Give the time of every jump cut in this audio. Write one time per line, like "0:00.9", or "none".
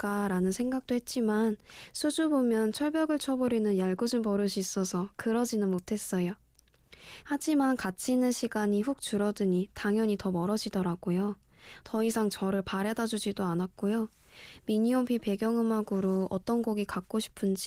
0:07.2